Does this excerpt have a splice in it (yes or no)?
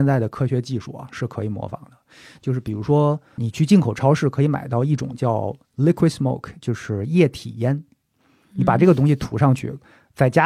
no